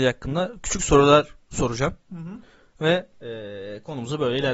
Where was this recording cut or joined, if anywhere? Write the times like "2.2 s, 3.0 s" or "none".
none